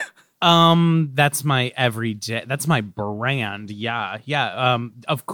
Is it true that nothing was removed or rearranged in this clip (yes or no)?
yes